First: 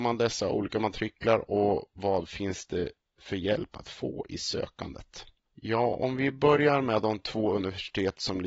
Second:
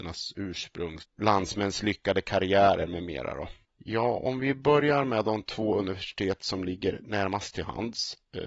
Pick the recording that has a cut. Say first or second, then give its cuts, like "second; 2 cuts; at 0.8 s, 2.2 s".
second; 2 cuts; at 1.0 s, 3.6 s